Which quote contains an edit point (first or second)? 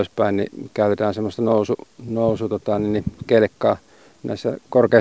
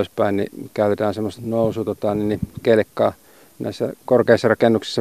second